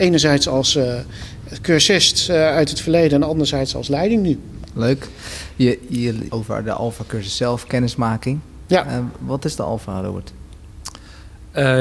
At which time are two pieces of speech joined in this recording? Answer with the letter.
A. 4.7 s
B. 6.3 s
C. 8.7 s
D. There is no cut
B